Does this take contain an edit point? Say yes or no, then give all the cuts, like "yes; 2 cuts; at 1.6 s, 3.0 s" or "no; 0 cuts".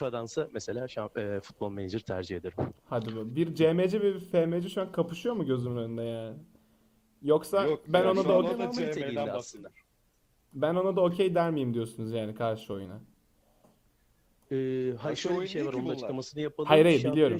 no; 0 cuts